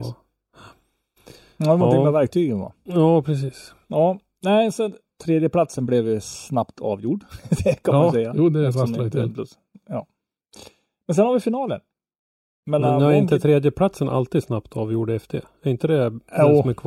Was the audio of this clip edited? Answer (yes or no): no